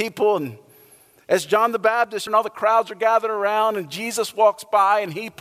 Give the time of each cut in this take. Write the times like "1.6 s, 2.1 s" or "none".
2.3 s